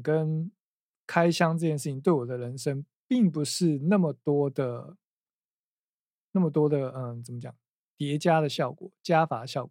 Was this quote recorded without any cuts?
yes; 0 cuts

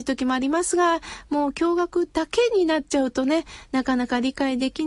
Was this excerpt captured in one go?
yes; 0 cuts

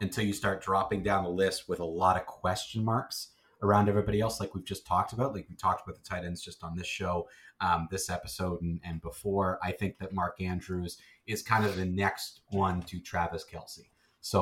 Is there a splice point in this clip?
no; 0 cuts

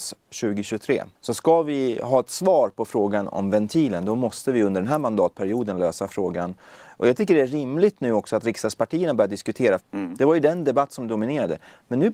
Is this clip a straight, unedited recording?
no; 2 cuts; at 1.1 s, 9.8 s

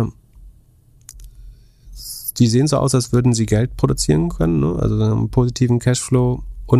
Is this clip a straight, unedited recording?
yes; 0 cuts

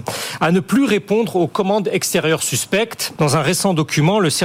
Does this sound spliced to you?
yes; 1 cut; at 3.2 s

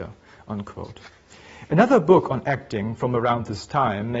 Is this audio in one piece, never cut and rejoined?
yes; 0 cuts

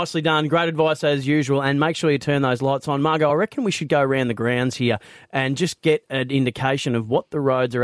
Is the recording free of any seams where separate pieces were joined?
yes; 0 cuts

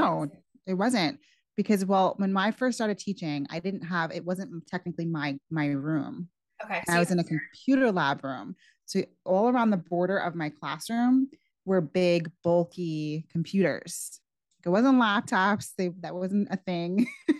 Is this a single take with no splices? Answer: yes; 0 cuts

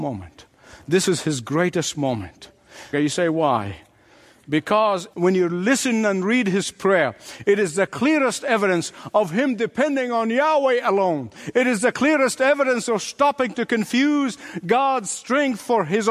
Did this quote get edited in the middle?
yes; 2 cuts; at 2.9 s, 11.5 s

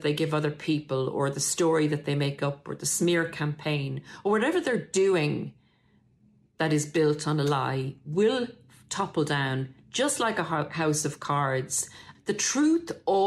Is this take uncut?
no; 1 cut; at 12.1 s

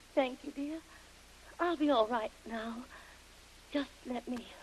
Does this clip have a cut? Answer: no; 0 cuts

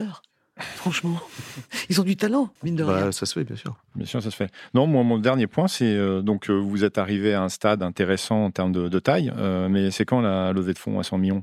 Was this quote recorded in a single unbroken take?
no; 1 cut; at 2.6 s

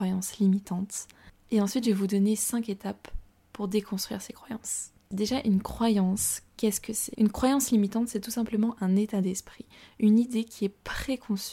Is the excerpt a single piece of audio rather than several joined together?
no; 1 cut; at 5.1 s

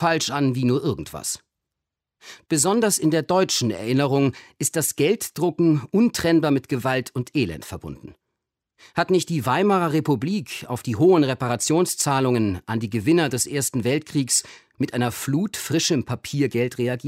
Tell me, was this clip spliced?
no; 0 cuts

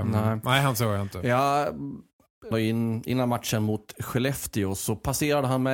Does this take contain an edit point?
yes; 1 cut; at 2.5 s

